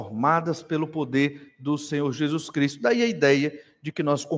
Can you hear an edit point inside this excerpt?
no; 0 cuts

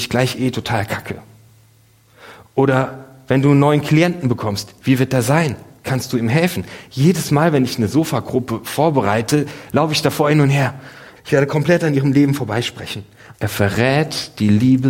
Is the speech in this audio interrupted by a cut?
yes; 2 cuts; at 11.1 s, 13.3 s

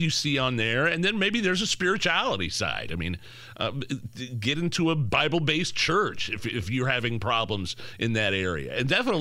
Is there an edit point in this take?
no; 0 cuts

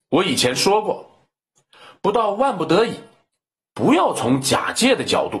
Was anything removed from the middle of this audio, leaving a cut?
no; 0 cuts

